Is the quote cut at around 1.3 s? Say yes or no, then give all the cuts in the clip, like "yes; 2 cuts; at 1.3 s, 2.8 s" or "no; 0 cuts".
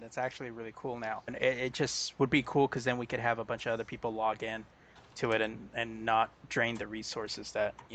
yes; 1 cut; at 1.3 s